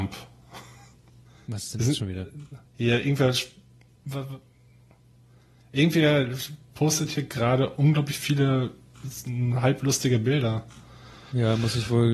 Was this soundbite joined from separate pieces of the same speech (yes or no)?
yes